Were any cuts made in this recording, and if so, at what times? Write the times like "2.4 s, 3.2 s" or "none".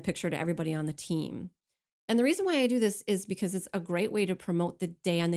1.9 s